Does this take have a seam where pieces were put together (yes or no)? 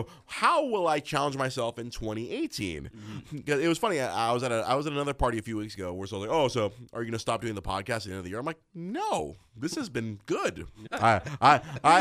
yes